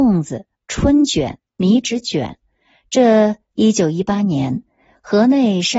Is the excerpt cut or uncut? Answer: cut